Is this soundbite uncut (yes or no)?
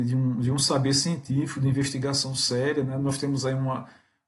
yes